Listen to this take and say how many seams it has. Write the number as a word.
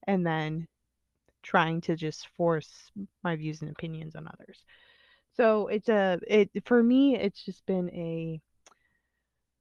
one